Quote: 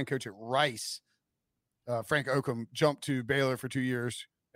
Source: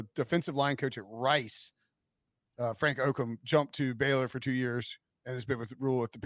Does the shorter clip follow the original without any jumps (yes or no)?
yes